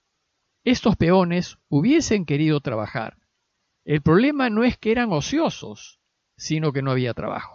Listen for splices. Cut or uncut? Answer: uncut